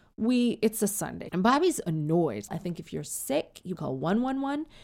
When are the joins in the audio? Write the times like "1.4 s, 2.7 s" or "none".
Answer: 1.3 s, 2.5 s, 3.8 s